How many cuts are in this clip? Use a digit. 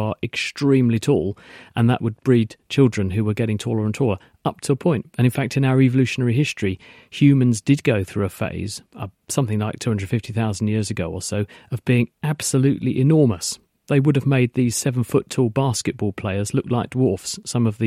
0